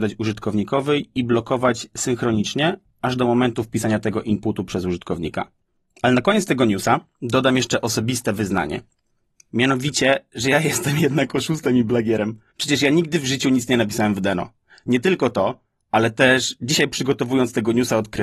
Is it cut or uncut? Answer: cut